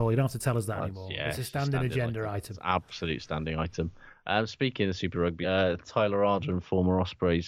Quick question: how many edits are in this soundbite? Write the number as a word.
one